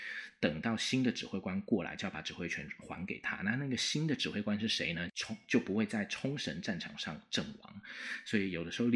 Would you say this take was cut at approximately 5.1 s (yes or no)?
yes